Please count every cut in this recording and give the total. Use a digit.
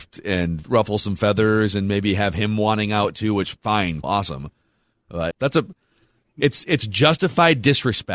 2